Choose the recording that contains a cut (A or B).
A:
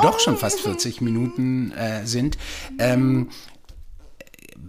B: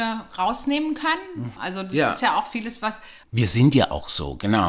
B